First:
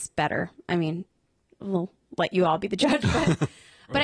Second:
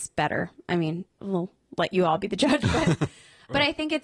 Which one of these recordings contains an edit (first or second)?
second